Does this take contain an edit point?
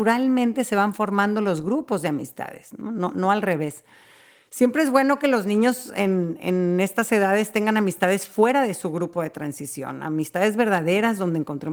no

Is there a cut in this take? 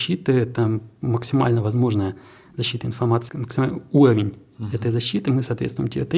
yes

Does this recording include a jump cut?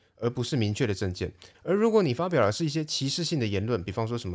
yes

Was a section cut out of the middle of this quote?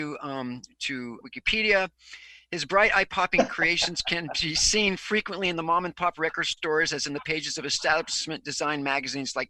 yes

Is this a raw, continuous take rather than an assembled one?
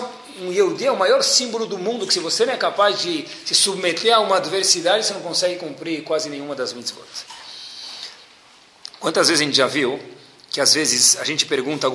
yes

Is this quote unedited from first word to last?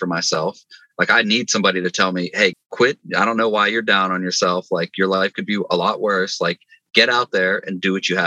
no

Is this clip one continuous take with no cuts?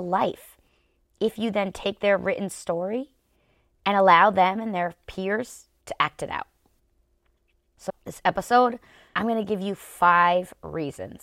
no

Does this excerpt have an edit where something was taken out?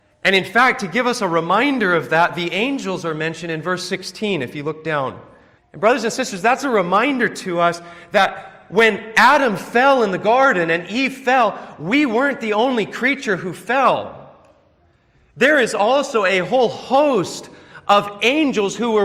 yes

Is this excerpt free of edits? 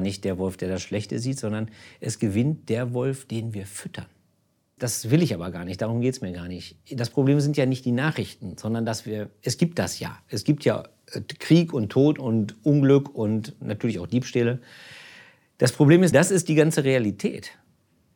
no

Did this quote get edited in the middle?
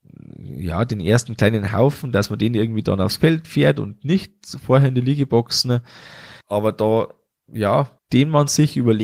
yes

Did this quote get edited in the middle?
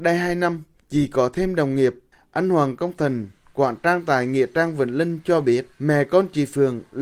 yes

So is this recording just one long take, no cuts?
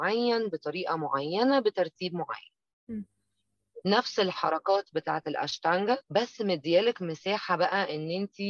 no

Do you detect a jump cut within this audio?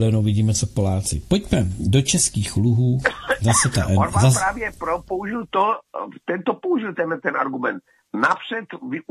no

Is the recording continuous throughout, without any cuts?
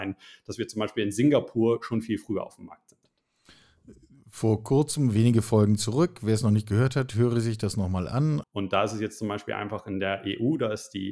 no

